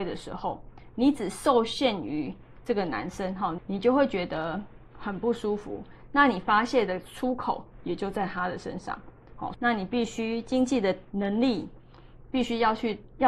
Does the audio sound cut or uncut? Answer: cut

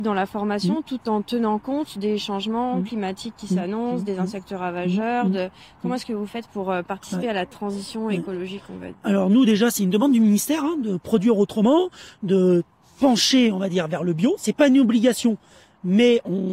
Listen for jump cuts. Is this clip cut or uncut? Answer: uncut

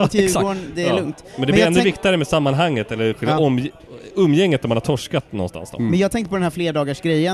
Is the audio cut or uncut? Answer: uncut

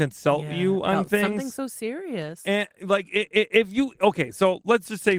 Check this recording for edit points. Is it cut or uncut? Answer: uncut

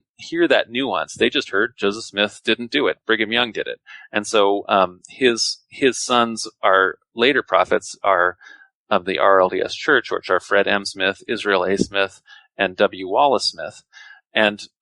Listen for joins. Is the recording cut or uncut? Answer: uncut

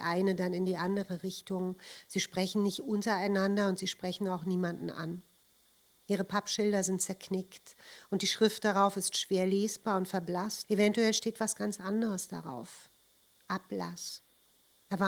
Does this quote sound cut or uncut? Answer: cut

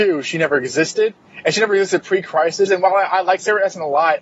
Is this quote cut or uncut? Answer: cut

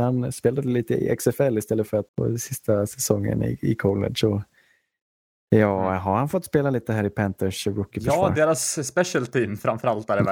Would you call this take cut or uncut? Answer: cut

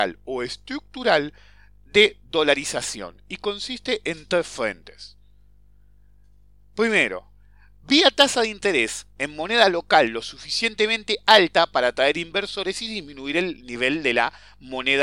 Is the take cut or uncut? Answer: uncut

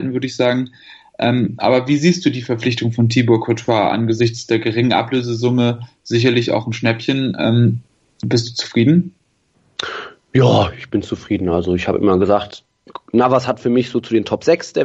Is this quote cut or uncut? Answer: uncut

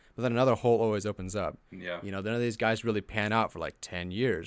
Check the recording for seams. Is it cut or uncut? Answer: uncut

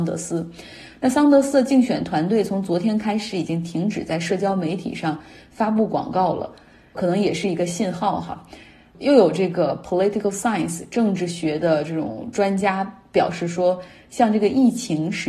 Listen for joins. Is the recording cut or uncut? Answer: uncut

